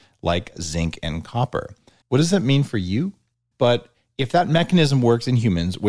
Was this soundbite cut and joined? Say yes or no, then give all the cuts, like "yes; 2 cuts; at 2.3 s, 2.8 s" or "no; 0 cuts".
yes; 2 cuts; at 2.0 s, 3.5 s